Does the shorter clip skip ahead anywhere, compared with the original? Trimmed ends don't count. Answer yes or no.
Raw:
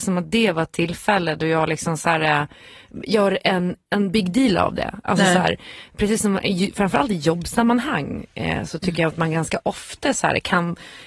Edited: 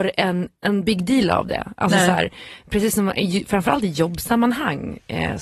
no